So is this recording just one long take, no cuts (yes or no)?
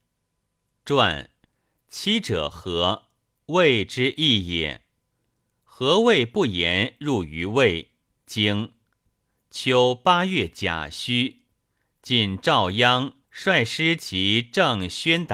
no